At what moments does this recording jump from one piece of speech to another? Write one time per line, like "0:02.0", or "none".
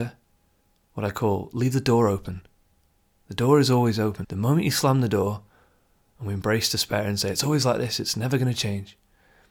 0:04.2

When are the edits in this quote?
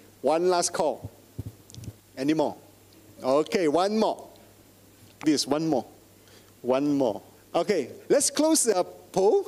0:05.2
0:07.4

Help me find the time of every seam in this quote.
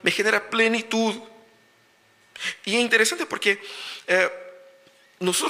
none

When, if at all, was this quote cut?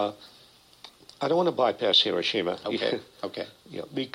none

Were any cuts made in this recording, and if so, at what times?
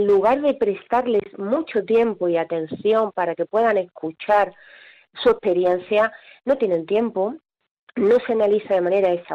none

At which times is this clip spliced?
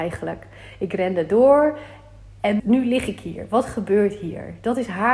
0:02.6

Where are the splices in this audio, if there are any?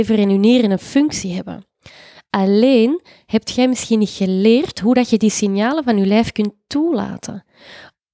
none

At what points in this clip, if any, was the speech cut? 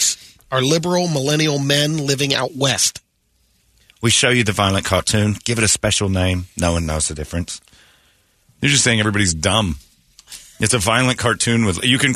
0:03.9

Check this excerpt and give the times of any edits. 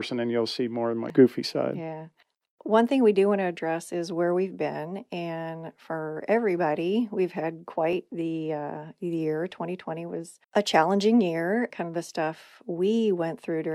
0:10.4
0:11.7

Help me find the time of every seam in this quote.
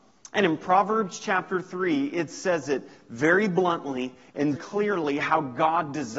0:04.5

